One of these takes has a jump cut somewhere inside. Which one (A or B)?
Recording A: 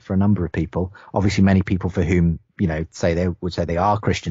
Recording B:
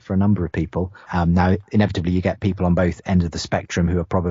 B